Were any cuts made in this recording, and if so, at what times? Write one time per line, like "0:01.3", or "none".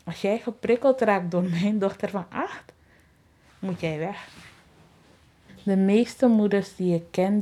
none